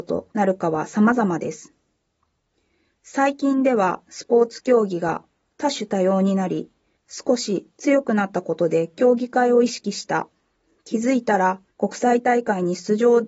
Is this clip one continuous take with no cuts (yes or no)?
no